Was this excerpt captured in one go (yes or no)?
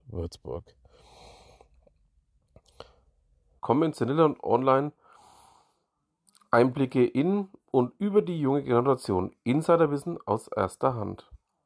no